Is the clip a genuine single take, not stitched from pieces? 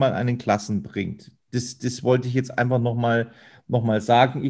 yes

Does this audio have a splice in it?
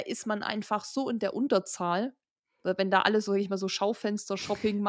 no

